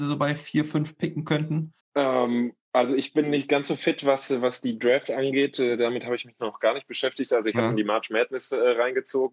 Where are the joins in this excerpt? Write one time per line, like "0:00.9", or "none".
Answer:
none